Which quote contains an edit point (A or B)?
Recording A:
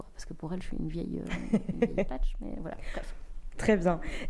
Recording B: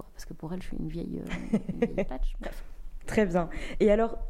B